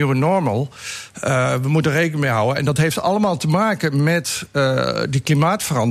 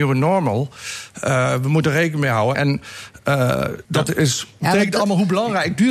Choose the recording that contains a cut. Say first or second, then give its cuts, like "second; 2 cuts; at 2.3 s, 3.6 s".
second; 2 cuts; at 2.5 s, 3.8 s